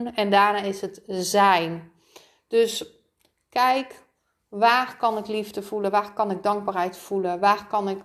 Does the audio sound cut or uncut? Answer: uncut